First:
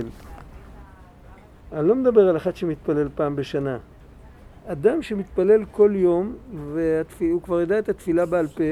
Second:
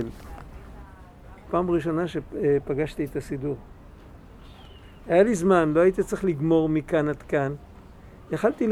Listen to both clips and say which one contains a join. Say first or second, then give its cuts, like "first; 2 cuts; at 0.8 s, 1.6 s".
second; 1 cut; at 1.5 s